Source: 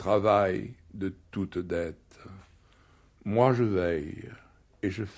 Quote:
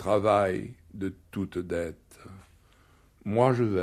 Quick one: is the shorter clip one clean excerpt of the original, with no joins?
yes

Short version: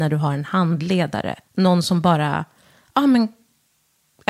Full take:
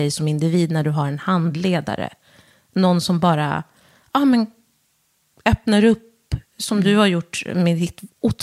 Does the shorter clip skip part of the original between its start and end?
yes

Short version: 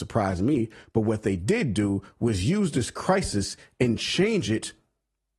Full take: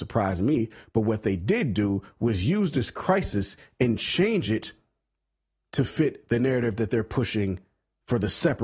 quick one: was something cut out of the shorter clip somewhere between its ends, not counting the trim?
no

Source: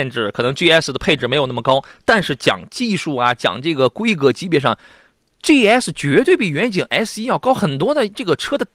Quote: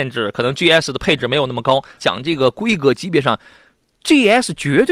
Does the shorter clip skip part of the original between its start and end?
yes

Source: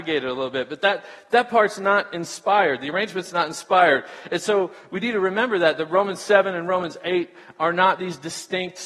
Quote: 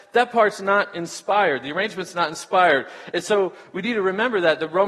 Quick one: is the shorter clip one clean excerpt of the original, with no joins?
yes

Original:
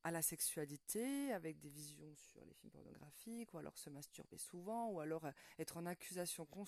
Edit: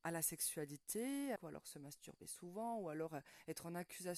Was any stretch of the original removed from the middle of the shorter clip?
yes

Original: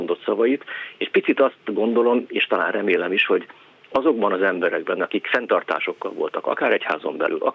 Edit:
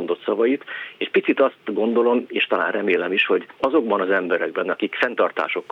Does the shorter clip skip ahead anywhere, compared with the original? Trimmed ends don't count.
yes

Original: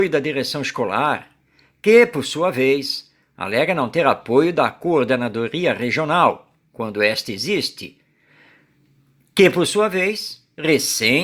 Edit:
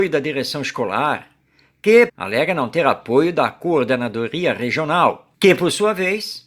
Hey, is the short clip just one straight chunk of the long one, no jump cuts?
no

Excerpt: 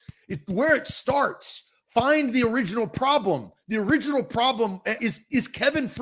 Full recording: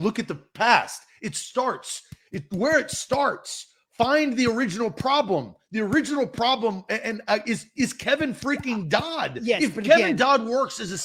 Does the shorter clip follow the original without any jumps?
no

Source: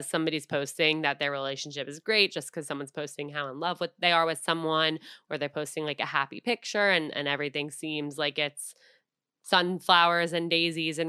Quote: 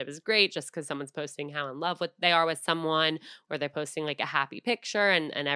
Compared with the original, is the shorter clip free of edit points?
yes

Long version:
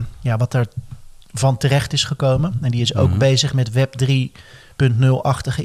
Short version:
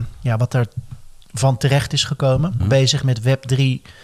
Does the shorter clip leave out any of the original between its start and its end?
yes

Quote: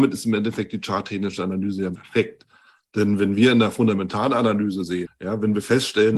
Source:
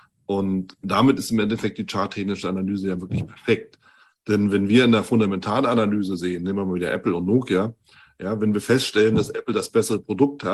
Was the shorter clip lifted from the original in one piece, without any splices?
no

